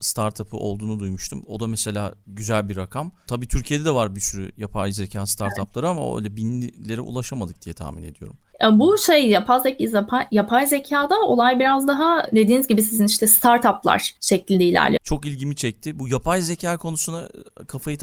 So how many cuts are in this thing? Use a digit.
1